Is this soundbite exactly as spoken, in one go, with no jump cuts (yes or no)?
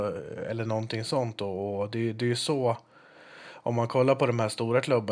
yes